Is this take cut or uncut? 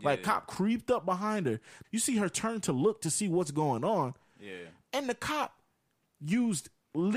cut